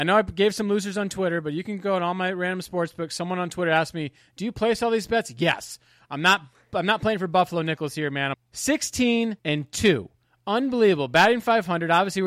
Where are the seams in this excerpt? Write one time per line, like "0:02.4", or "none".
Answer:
0:08.3
0:09.4